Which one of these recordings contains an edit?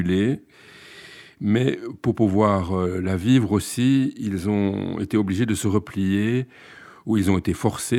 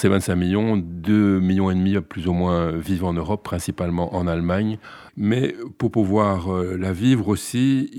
second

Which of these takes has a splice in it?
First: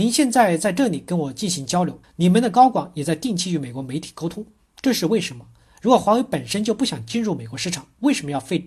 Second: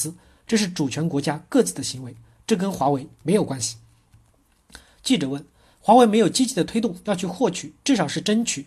first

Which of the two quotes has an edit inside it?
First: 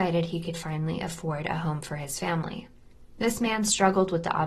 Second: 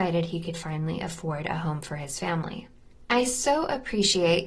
second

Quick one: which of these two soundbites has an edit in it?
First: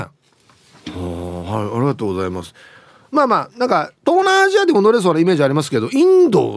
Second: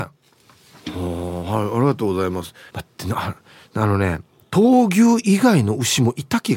second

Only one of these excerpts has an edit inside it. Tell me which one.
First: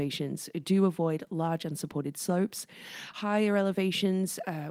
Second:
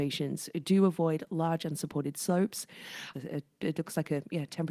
second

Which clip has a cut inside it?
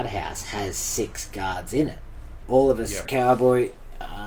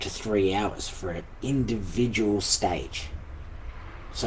first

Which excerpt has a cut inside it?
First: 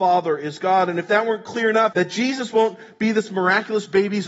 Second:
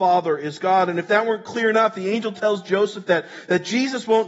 first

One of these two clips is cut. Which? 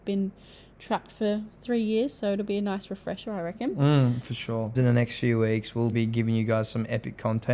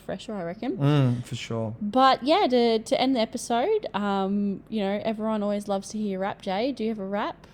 first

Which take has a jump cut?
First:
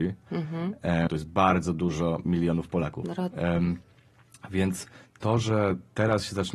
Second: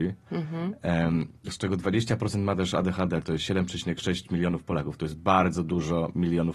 first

